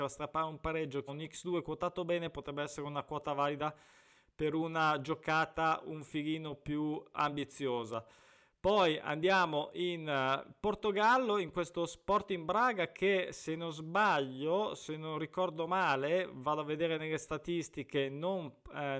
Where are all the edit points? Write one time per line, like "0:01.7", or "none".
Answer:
0:01.1